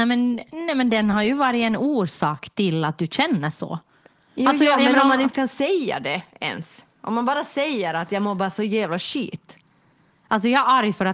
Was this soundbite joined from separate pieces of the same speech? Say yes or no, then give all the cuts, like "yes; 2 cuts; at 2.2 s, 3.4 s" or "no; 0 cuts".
no; 0 cuts